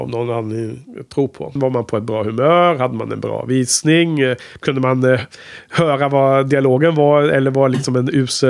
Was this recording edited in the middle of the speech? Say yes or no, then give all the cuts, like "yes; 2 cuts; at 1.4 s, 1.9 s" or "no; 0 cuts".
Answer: yes; 1 cut; at 1.6 s